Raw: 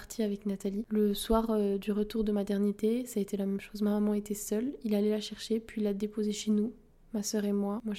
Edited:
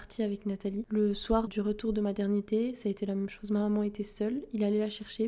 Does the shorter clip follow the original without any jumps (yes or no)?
no